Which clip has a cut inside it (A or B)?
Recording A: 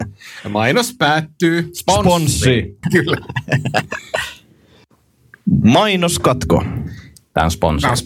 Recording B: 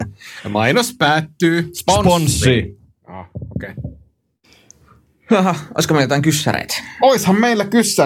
A